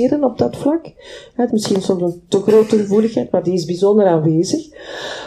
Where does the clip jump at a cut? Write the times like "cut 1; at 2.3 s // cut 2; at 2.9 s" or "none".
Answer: cut 1; at 1.5 s